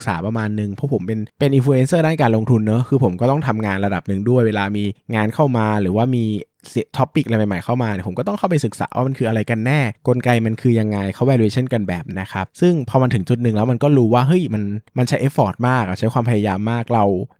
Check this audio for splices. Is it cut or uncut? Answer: cut